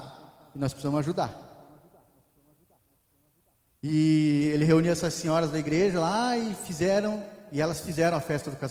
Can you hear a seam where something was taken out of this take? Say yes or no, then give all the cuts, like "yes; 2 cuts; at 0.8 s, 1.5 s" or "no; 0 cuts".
no; 0 cuts